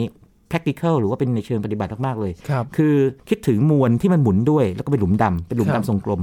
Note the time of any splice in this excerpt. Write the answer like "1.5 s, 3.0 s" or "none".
3.2 s